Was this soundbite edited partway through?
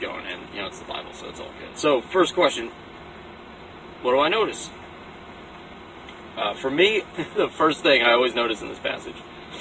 yes; 2 cuts; at 1.7 s, 7.1 s

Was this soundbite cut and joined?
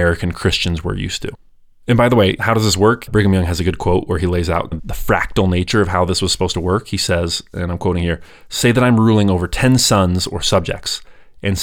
yes; 2 cuts; at 3.1 s, 4.8 s

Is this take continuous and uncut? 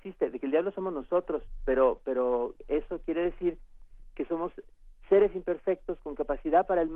yes; 0 cuts

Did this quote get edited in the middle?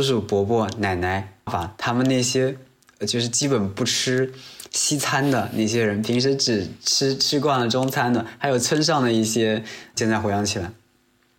yes; 2 cuts; at 1.5 s, 9.9 s

